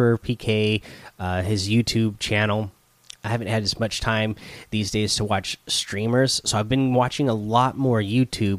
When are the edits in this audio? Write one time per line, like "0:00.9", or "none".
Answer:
none